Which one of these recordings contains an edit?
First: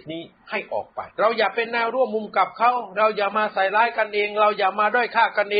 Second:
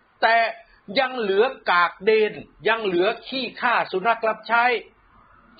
first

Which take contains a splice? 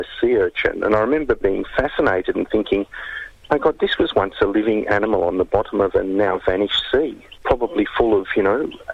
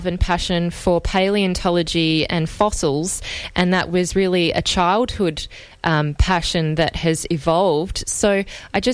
first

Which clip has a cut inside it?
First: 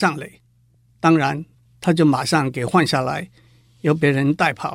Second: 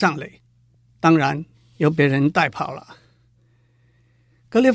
second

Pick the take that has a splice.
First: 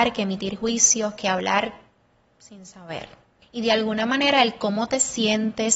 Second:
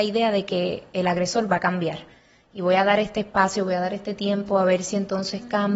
first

